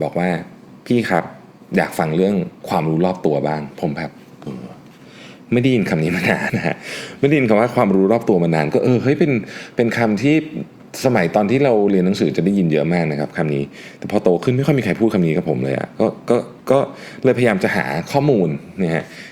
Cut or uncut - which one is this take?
cut